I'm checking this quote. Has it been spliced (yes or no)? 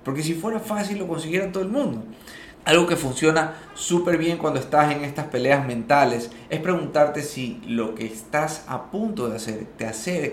yes